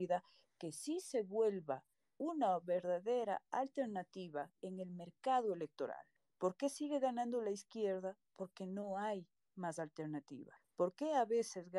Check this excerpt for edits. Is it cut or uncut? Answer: uncut